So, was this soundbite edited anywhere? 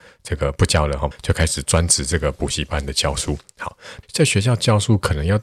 yes; 2 cuts; at 1.1 s, 4.0 s

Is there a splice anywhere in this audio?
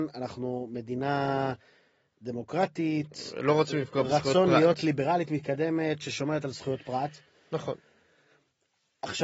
no; 0 cuts

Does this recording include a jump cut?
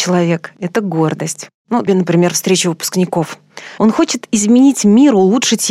yes; 2 cuts; at 1.9 s, 3.8 s

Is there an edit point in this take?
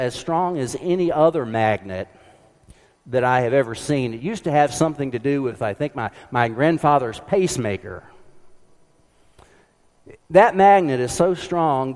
yes; 1 cut; at 10.2 s

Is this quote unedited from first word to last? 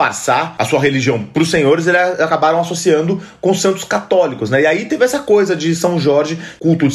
yes; 0 cuts

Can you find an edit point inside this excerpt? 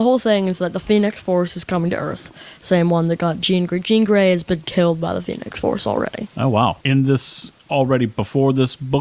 yes; 1 cut; at 6.8 s

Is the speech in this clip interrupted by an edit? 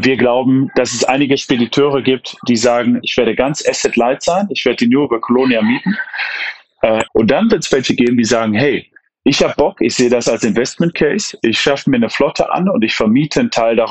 yes; 2 cuts; at 3.0 s, 7.1 s

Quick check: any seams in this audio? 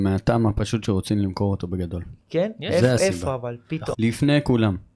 yes; 1 cut; at 3.9 s

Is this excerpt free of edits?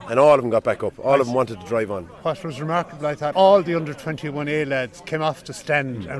no; 1 cut; at 3.3 s

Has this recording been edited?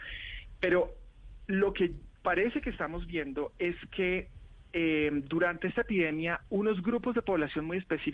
no; 0 cuts

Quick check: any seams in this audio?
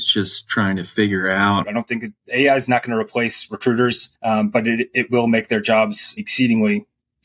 yes; 3 cuts; at 1.6 s, 4.2 s, 6.2 s

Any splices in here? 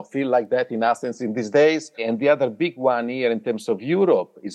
yes; 1 cut; at 2.0 s

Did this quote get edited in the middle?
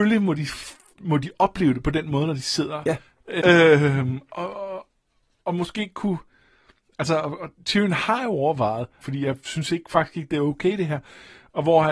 yes; 2 cuts; at 3.4 s, 9.0 s

